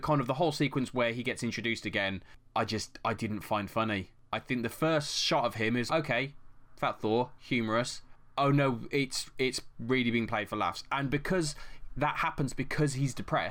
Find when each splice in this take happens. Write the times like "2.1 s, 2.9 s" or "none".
5.9 s